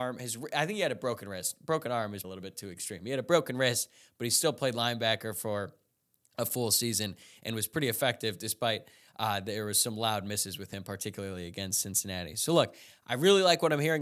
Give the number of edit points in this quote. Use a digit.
1